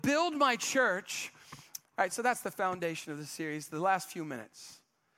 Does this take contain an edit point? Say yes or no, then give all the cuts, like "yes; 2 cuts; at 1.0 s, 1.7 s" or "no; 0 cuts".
yes; 1 cut; at 1.8 s